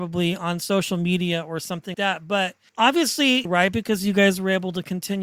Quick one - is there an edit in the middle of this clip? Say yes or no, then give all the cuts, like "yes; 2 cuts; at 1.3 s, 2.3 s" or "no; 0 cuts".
yes; 2 cuts; at 1.9 s, 3.4 s